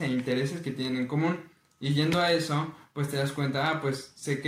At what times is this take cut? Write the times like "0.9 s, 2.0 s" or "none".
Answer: none